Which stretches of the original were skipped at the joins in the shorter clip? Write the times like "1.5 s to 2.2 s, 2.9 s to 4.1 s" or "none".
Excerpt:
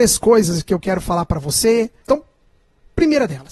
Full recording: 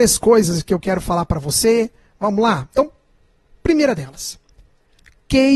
2.0 s to 2.7 s